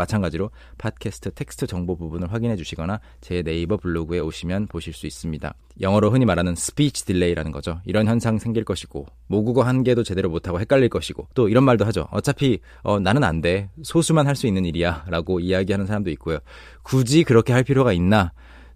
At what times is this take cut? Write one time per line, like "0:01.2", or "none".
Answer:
0:05.6
0:11.3